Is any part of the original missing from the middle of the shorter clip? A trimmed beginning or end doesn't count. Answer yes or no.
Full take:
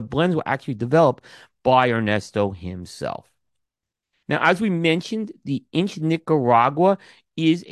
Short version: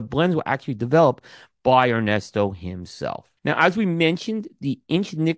yes